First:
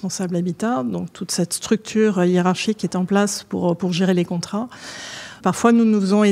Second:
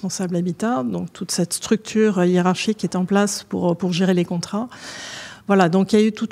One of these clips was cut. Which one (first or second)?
first